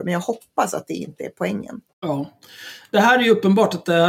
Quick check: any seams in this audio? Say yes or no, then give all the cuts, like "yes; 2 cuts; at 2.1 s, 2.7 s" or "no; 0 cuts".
no; 0 cuts